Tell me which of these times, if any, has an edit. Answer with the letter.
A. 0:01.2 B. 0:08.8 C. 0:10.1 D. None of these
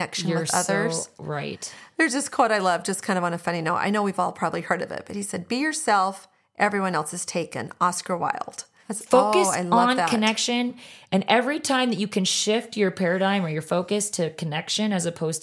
B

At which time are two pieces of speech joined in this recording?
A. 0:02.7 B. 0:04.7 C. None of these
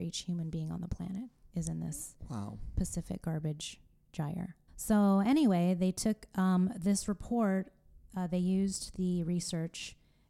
B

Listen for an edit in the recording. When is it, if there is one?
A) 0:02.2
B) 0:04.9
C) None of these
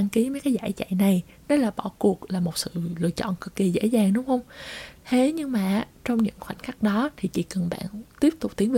C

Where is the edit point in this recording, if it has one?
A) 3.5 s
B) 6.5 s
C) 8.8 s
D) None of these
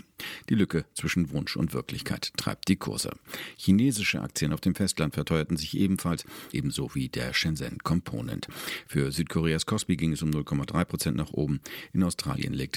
B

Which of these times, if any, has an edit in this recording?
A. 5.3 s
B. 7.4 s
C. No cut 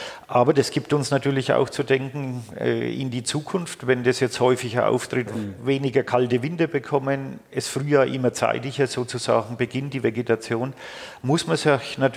A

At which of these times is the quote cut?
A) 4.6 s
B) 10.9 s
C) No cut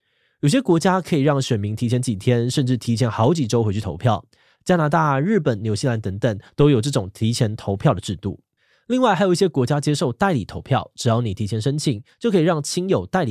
C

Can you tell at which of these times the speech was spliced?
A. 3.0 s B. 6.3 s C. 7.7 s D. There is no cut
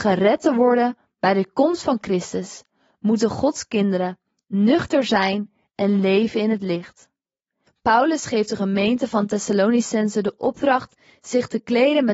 C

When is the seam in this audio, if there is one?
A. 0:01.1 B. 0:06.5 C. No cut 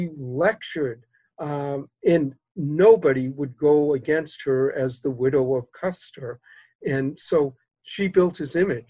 C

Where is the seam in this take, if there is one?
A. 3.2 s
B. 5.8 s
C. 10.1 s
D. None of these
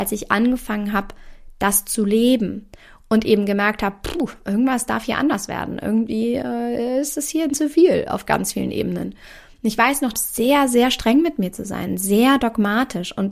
C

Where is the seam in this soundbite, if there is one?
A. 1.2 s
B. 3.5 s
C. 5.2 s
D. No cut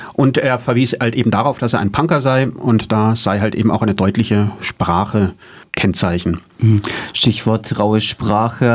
D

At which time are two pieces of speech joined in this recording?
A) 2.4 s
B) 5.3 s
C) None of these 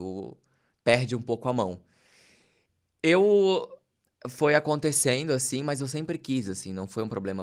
C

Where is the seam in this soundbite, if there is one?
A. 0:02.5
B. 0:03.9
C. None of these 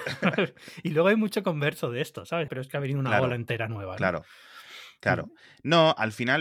A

